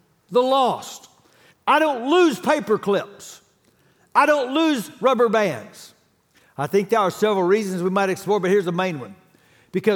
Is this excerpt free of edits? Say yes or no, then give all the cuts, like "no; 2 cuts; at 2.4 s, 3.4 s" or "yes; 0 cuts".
no; 2 cuts; at 1.5 s, 6.4 s